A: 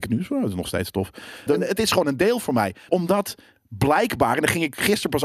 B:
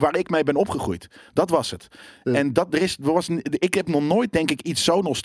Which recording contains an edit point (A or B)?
A